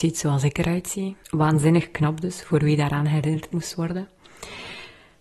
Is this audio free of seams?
no; 1 cut; at 1.2 s

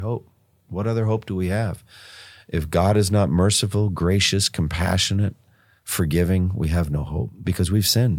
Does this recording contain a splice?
no; 0 cuts

